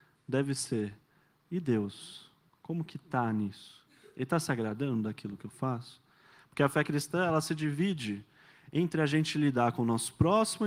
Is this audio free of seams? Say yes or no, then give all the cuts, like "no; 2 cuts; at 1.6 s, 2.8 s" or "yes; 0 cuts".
yes; 0 cuts